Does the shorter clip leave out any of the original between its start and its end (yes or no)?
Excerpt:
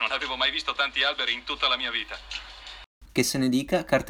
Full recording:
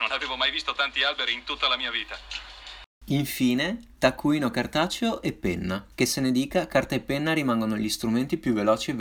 yes